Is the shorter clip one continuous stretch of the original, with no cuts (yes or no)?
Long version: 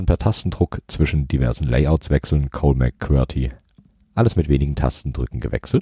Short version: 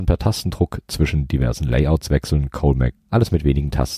no